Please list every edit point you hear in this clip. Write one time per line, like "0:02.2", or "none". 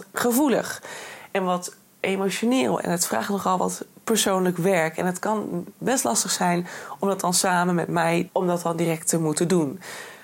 0:08.3